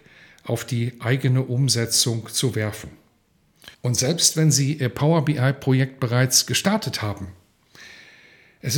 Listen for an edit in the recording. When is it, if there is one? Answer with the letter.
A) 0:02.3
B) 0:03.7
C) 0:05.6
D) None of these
B